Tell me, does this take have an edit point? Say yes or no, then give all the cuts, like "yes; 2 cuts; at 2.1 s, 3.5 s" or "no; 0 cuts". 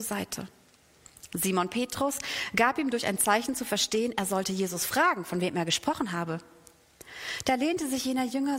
no; 0 cuts